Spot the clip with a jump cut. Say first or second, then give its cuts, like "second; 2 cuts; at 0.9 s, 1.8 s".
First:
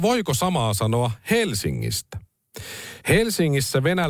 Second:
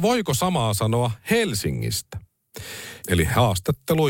second; 1 cut; at 3.0 s